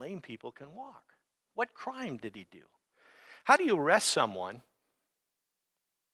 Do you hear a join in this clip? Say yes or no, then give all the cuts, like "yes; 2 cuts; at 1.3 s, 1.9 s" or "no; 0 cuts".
yes; 1 cut; at 1.4 s